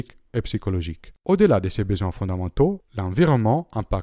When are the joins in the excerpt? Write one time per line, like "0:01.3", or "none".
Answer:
0:01.2